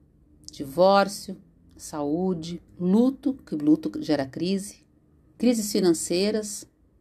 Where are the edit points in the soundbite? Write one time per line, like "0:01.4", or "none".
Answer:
0:02.7
0:05.4